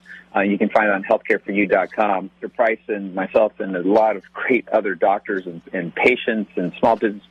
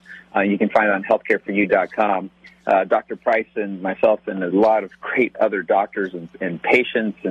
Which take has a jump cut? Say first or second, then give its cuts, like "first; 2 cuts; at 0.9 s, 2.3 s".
first; 1 cut; at 2.4 s